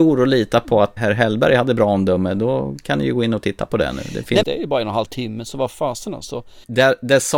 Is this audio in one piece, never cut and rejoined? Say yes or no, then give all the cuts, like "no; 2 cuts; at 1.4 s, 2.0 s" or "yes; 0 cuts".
no; 2 cuts; at 1.0 s, 4.4 s